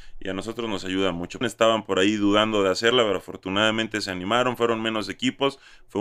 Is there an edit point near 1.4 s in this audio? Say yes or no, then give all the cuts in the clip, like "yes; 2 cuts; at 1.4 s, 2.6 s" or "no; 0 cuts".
yes; 1 cut; at 1.4 s